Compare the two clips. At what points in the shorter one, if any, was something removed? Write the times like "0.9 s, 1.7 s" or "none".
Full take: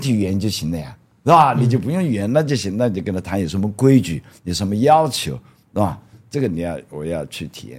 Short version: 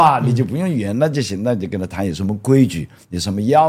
none